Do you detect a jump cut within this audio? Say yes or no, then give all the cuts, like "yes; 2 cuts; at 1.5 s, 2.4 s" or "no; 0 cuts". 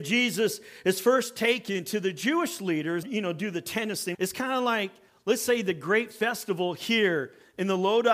yes; 2 cuts; at 3.0 s, 4.1 s